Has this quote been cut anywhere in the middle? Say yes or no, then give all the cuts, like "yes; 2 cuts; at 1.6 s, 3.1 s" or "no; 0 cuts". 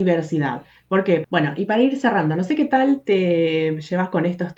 yes; 1 cut; at 1.2 s